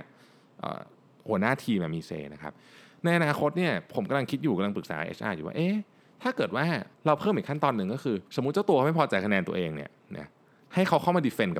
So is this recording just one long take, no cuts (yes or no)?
no